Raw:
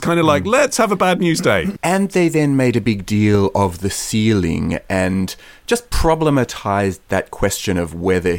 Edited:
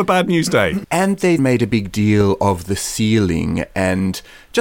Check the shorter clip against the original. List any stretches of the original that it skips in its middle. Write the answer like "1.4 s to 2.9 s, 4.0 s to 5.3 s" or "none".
2.3 s to 2.5 s